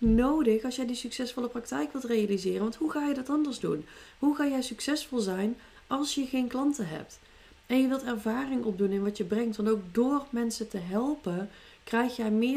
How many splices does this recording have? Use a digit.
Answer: 0